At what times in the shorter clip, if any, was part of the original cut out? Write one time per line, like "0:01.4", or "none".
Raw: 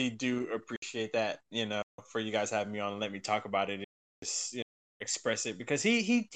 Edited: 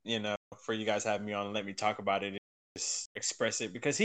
0:03.1